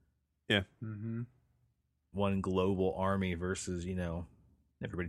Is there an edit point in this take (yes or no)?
yes